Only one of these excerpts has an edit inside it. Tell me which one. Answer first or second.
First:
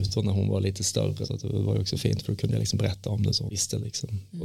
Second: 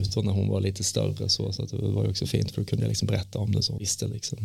first